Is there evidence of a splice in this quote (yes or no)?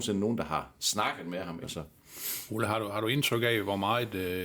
yes